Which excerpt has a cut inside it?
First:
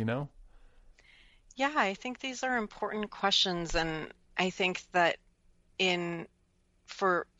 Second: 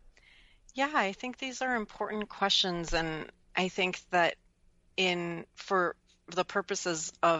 second; 1 cut; at 5.5 s

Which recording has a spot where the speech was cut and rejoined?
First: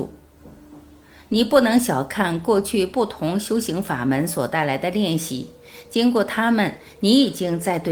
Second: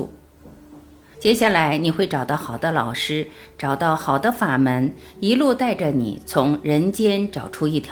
second; 1 cut; at 1.1 s

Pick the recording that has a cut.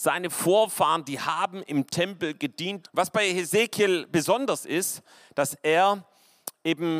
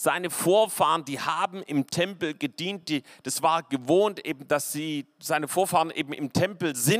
first; 1 cut; at 2.8 s

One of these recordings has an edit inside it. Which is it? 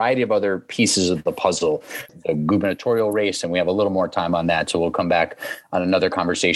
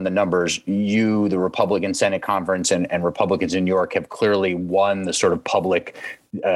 first; 1 cut; at 2.1 s

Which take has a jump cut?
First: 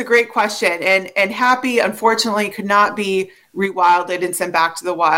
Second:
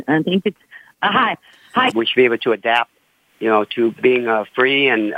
second; 1 cut; at 1.9 s

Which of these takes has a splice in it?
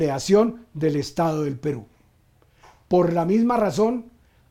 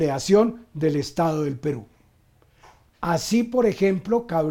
second; 1 cut; at 2.9 s

